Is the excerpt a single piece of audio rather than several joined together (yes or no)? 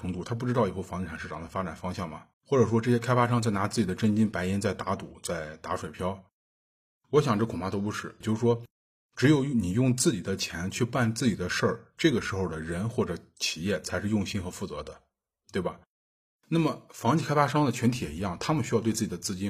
no